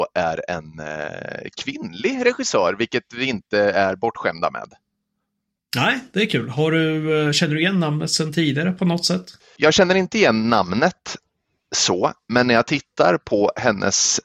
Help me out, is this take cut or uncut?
uncut